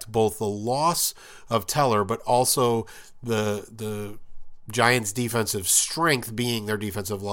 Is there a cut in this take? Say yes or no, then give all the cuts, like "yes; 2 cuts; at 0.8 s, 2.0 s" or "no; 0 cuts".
no; 0 cuts